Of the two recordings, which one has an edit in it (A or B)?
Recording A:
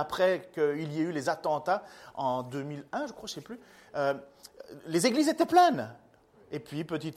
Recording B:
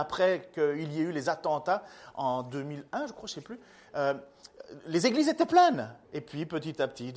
B